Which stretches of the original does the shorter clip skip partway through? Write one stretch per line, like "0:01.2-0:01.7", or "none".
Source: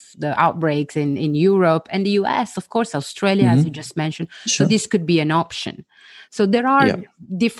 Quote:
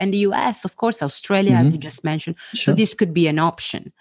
none